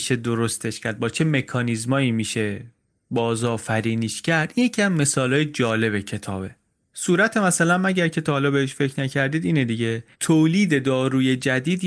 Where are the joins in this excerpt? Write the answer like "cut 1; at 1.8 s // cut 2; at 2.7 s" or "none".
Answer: cut 1; at 10.1 s